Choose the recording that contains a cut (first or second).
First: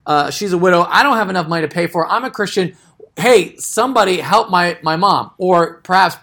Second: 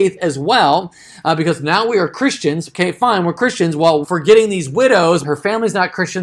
second